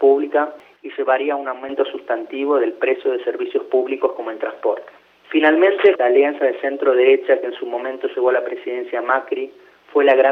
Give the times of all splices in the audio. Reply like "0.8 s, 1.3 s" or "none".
5.9 s